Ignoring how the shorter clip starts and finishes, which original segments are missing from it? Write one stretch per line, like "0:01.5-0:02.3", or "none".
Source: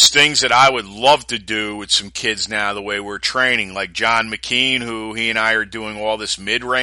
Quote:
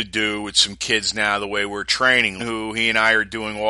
0:03.7-0:04.8